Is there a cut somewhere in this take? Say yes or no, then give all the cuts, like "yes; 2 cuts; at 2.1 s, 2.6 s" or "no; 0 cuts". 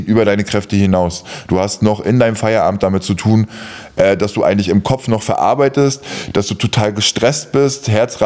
no; 0 cuts